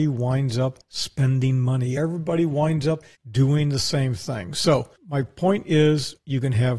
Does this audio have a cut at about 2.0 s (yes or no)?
no